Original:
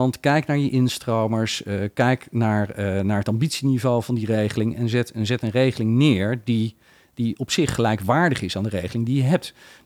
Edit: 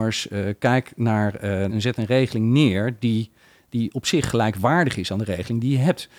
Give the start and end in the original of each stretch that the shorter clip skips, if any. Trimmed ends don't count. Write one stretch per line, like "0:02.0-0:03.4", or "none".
0:03.0-0:05.1